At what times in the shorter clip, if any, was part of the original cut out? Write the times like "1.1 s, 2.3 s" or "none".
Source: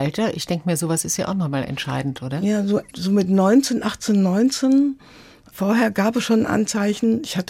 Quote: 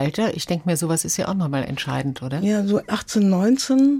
2.9 s

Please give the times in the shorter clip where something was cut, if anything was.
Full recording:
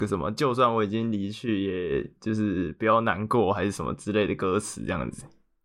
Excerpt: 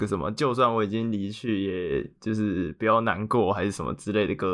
none

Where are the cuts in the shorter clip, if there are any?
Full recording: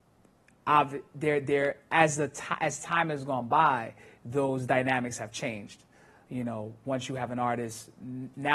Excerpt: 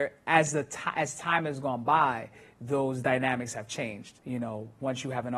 4.2 s

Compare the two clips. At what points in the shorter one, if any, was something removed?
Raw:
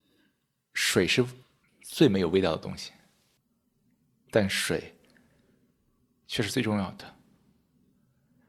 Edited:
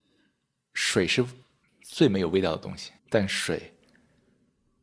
3.0 s

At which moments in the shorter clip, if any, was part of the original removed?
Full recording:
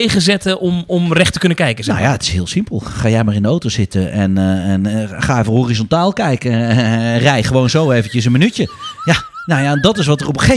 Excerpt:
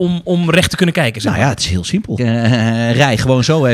2.2 s

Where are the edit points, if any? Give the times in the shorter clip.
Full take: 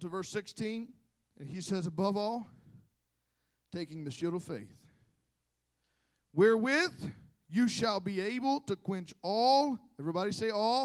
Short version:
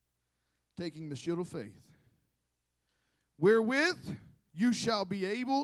none

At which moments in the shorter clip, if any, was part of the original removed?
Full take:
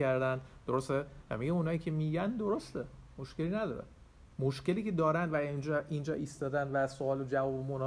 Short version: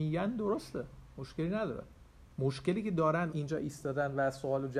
3.3 s

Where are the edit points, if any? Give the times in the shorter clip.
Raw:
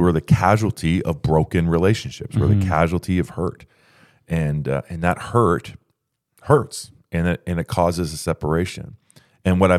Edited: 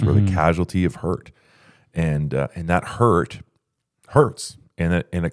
none

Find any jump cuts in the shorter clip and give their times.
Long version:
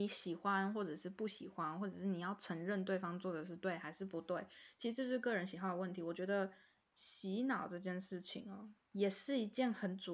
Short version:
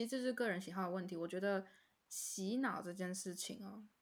none

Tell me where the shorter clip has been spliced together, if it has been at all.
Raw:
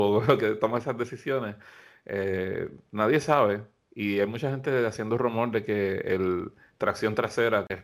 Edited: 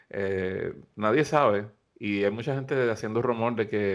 none

